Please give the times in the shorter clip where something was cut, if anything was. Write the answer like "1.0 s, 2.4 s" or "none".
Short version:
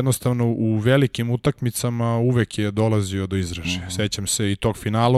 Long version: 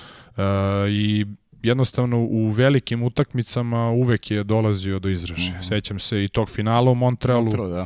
none